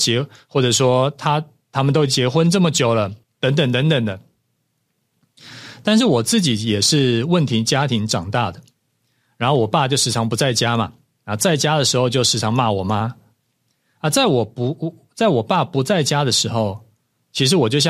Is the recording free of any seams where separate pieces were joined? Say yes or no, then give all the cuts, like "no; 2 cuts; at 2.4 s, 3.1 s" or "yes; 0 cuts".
no; 1 cut; at 3.2 s